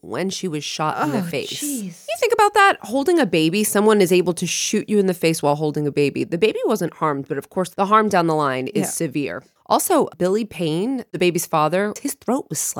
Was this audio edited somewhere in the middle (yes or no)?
no